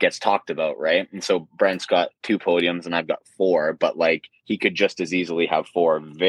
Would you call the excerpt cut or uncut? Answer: uncut